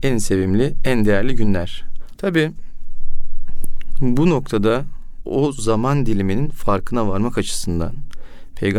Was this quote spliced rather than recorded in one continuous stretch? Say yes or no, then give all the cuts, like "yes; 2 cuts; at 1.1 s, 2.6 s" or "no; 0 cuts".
yes; 1 cut; at 2.2 s